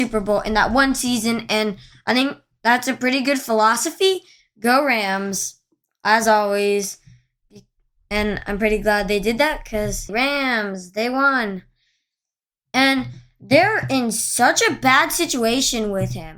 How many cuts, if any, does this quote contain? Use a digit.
2